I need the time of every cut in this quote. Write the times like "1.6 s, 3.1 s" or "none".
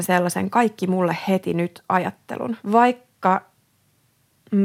2.6 s